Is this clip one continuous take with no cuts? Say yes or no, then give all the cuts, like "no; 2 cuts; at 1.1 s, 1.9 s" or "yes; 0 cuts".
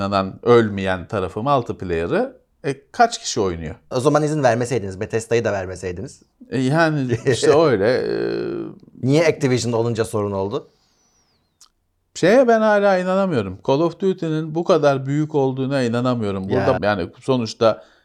no; 2 cuts; at 3.9 s, 16.8 s